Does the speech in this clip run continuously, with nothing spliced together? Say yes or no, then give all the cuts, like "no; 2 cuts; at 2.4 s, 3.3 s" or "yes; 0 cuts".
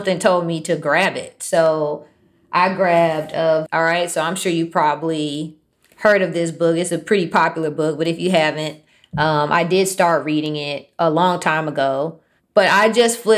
no; 1 cut; at 3.7 s